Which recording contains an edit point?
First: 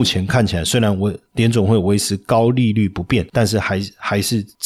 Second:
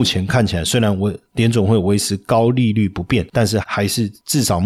second; 1 cut; at 3.6 s

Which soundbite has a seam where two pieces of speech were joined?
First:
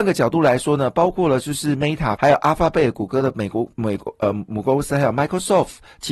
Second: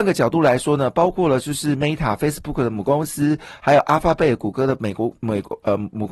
first; 1 cut; at 2.2 s

